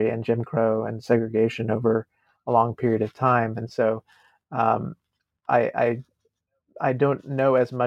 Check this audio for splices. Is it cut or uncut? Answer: uncut